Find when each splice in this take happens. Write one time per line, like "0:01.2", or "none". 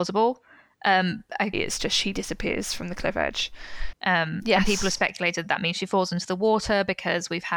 0:01.5
0:03.9